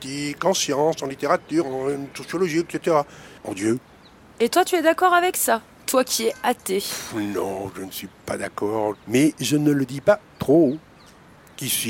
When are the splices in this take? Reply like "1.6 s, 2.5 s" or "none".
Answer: 3.4 s, 8.9 s